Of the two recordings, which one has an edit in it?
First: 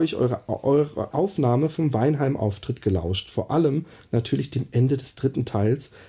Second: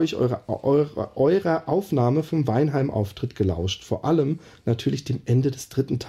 first; 1 cut; at 1.1 s

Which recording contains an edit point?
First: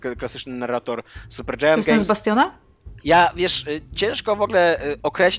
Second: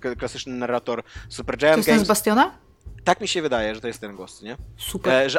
first; 1 cut; at 3.0 s

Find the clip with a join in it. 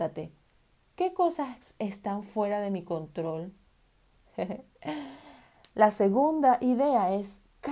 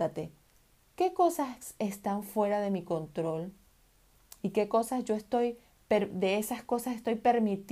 first; 1 cut; at 4.2 s

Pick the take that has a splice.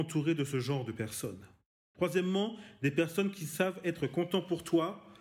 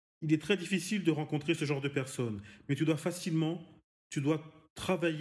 first; 1 cut; at 1.8 s

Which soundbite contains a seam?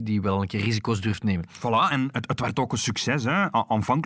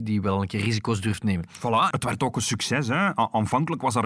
second; 1 cut; at 1.9 s

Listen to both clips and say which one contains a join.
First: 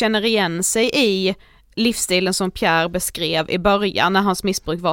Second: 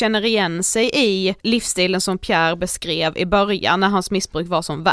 second; 1 cut; at 1.4 s

